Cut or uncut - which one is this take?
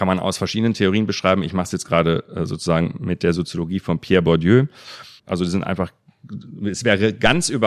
cut